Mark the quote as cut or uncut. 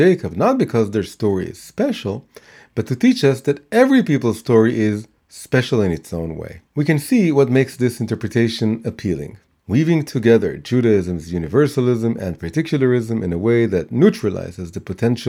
cut